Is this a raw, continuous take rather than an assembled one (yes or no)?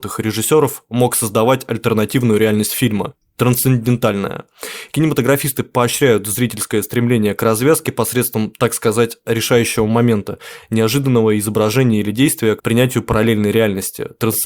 no